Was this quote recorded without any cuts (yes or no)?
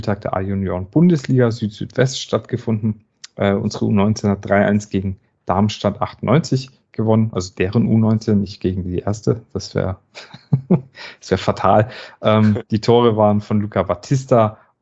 yes